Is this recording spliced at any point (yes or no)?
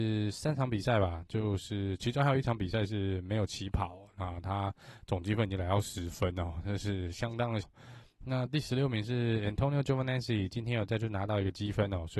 yes